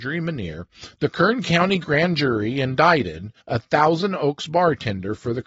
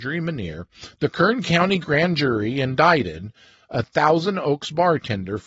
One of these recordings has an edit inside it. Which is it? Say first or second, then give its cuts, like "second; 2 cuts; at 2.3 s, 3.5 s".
first; 1 cut; at 3.4 s